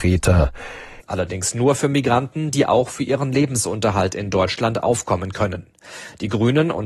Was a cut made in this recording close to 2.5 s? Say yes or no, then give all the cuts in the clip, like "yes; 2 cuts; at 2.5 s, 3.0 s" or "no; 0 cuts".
no; 1 cut; at 1.0 s